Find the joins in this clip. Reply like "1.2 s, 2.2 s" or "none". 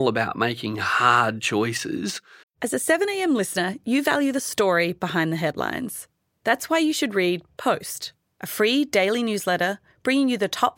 2.4 s